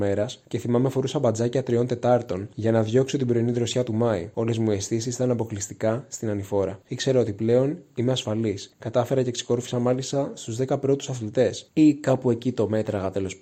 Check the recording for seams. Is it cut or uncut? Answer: cut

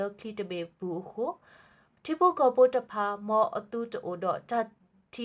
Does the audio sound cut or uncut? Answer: uncut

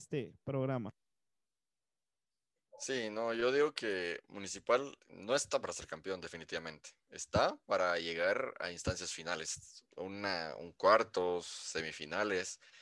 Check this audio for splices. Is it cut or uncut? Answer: uncut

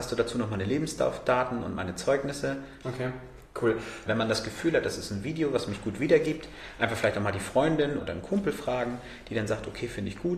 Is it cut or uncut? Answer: cut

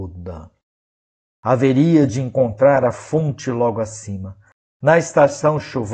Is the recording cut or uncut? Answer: cut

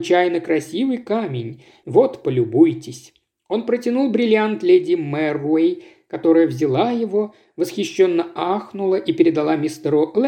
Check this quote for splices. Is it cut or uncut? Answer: cut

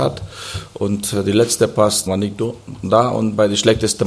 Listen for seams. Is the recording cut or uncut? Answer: cut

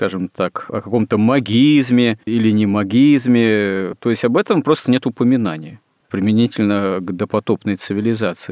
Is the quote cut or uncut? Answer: cut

